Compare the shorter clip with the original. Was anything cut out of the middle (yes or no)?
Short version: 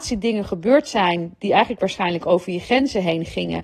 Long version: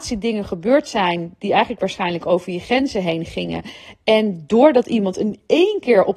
no